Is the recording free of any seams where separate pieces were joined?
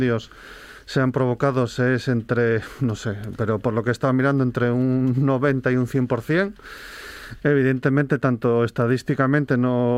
no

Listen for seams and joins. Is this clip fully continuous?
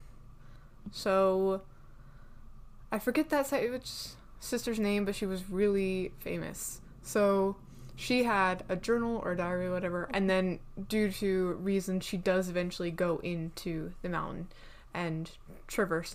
no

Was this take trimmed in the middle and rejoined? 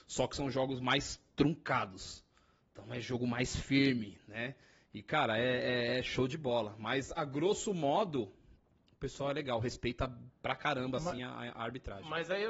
no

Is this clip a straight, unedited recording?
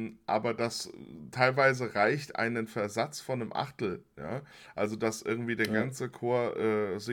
yes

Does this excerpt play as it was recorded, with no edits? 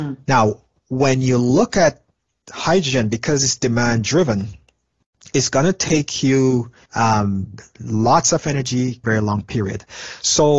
no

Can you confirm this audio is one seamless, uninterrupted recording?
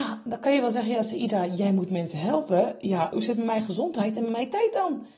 no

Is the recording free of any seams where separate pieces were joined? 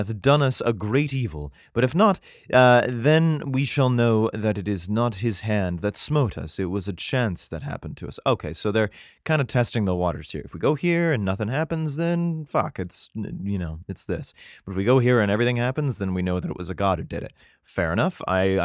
yes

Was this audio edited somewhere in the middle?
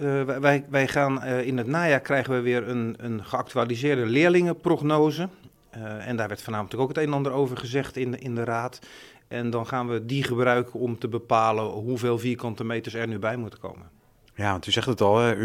no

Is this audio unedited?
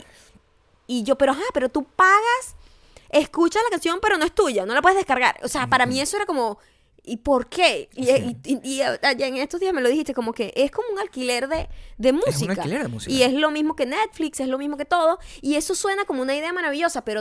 yes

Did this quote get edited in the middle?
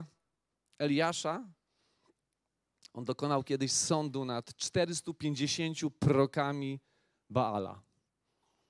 no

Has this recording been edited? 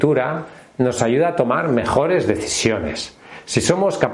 no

